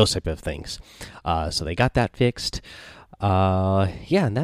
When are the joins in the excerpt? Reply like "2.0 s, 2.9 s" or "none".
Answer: none